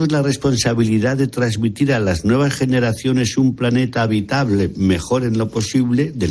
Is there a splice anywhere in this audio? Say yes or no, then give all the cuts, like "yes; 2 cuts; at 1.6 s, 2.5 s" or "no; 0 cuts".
no; 0 cuts